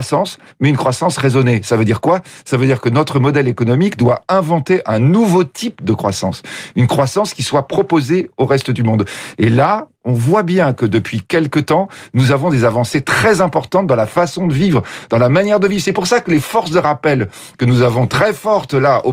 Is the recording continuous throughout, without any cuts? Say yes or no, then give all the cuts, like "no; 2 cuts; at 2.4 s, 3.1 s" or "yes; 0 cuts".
yes; 0 cuts